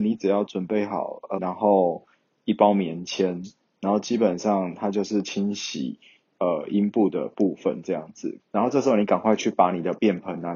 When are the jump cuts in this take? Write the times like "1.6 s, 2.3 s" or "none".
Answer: 1.4 s, 8.4 s